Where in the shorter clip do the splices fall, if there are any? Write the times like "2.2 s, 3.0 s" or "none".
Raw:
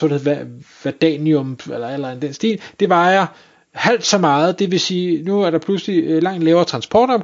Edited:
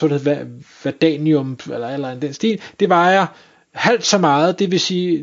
none